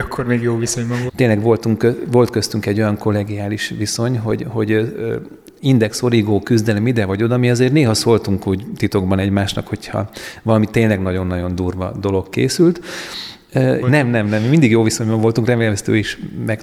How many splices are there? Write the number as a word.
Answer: two